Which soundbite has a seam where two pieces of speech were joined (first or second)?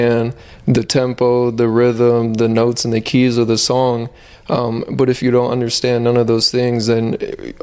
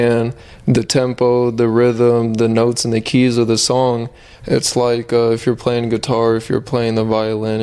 second